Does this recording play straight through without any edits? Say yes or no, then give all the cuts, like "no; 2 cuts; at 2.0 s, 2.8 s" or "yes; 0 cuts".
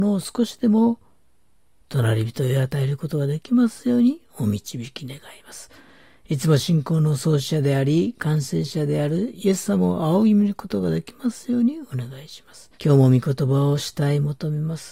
no; 1 cut; at 12.7 s